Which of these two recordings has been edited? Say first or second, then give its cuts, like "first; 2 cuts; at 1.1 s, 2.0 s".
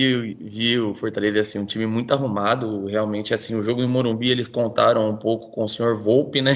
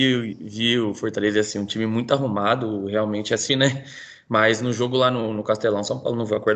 second; 1 cut; at 3.5 s